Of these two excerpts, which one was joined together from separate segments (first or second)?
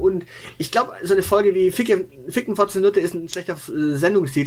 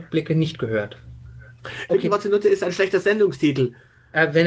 second